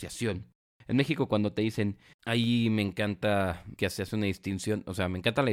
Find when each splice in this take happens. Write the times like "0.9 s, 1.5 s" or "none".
2.1 s